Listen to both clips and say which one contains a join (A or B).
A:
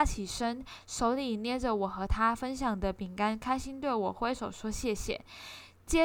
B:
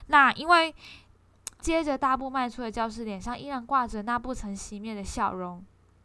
B